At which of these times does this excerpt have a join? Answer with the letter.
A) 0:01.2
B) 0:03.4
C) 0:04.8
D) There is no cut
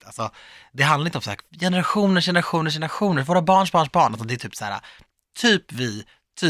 D